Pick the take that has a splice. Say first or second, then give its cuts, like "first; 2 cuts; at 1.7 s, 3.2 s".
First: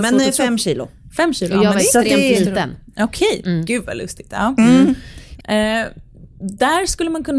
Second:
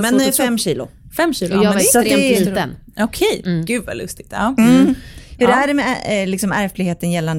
first; 1 cut; at 5.4 s